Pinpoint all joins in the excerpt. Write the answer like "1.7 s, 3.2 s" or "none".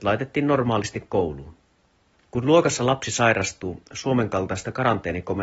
2.1 s